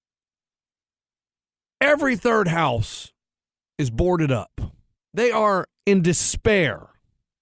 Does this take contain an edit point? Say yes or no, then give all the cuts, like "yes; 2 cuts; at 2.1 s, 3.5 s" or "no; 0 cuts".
yes; 1 cut; at 4.9 s